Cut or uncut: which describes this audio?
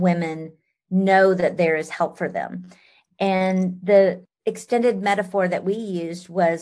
cut